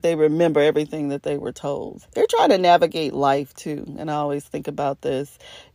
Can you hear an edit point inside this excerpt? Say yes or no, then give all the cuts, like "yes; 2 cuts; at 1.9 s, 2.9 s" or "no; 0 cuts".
yes; 1 cut; at 2.0 s